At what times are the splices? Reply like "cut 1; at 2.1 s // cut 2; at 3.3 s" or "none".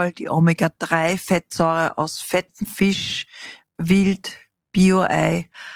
cut 1; at 3.8 s